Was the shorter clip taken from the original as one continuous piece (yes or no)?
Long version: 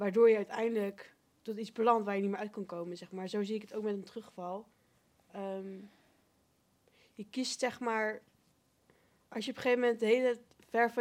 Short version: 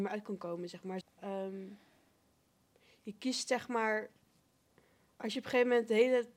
no